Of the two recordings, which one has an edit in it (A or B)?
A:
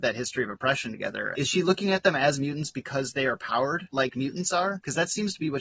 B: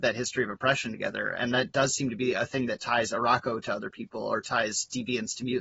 A